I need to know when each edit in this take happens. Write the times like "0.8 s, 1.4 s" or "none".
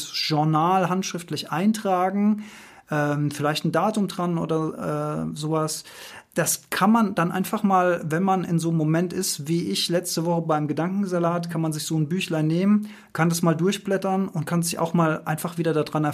none